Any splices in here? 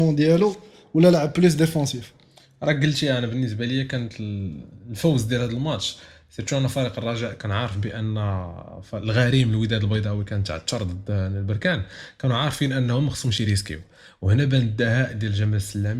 no; 0 cuts

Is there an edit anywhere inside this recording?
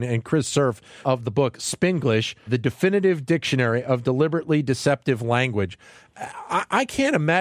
yes; 2 cuts; at 1.0 s, 2.5 s

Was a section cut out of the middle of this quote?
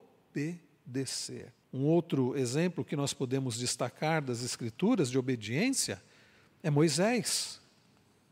yes; 1 cut; at 1.6 s

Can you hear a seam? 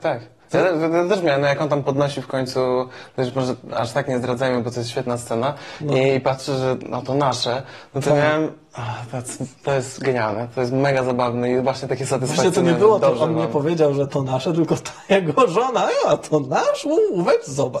no; 0 cuts

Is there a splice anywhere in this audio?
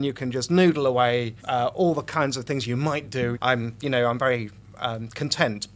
yes; 2 cuts; at 1.4 s, 3.3 s

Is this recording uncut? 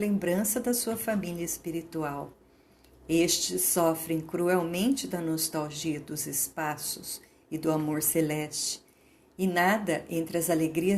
yes; 0 cuts

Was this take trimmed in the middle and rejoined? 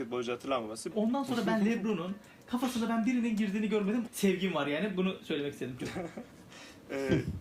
yes; 2 cuts; at 0.9 s, 4.1 s

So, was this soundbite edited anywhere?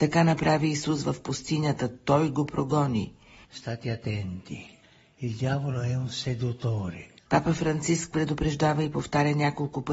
yes; 2 cuts; at 3.4 s, 7.3 s

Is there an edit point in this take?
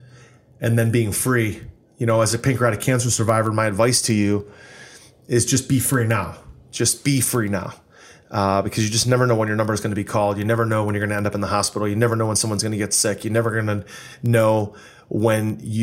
no; 0 cuts

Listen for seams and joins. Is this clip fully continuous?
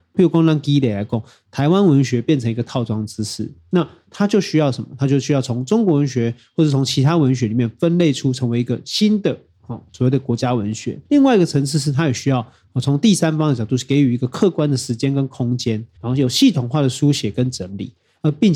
no; 2 cuts; at 11.0 s, 16.0 s

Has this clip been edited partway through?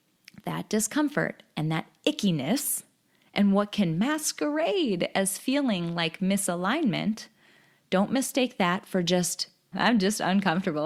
yes; 1 cut; at 9.7 s

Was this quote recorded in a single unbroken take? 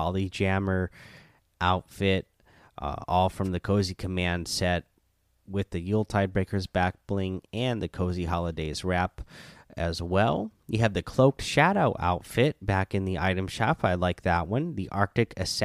yes; 0 cuts

